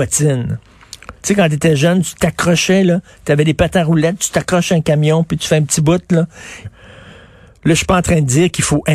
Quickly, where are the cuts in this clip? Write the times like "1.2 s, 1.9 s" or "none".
6.6 s